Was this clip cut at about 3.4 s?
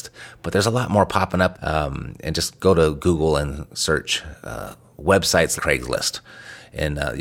no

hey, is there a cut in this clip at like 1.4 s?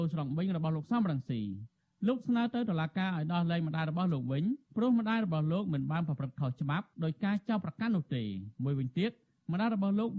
no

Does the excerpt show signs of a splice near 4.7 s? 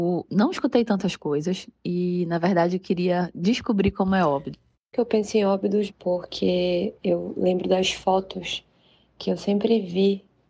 yes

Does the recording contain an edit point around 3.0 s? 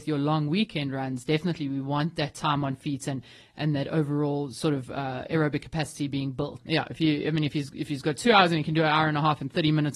no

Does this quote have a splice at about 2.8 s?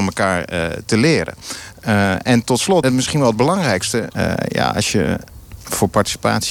yes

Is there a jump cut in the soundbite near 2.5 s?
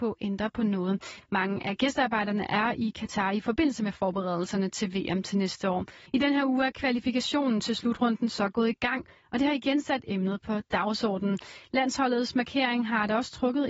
no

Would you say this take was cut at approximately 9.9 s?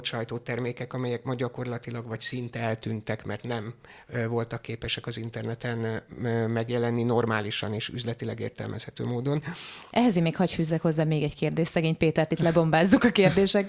yes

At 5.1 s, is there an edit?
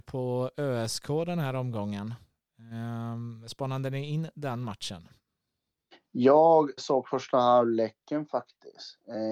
no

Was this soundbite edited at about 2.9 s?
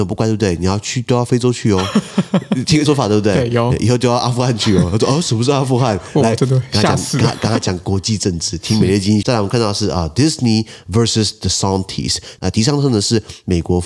yes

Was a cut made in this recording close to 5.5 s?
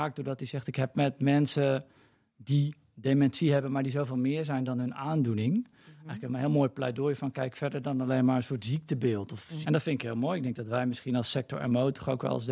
no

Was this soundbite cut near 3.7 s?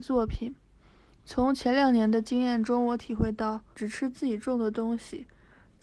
yes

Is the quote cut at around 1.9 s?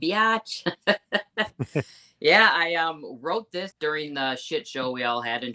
no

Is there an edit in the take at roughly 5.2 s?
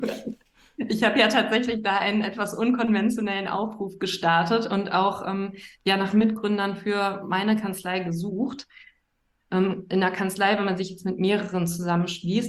no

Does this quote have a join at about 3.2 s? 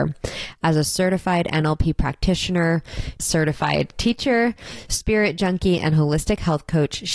yes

